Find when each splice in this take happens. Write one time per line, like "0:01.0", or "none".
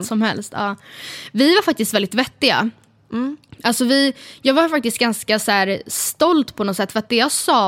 none